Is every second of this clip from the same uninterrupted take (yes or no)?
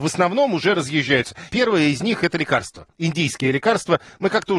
no